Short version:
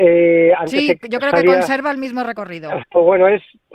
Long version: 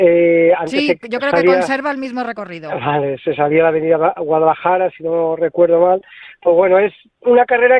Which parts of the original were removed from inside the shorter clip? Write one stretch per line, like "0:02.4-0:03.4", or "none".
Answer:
0:02.8-0:06.3